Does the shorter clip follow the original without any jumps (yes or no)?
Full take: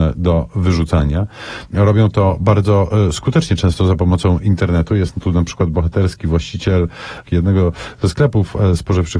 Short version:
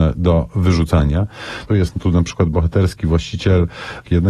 no